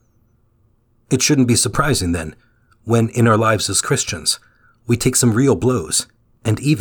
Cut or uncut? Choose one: uncut